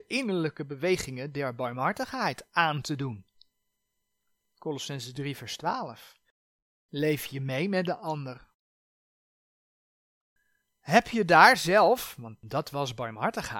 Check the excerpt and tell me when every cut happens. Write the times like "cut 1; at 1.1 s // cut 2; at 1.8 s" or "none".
none